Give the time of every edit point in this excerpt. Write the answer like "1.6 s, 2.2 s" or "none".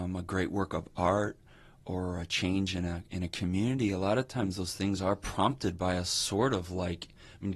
none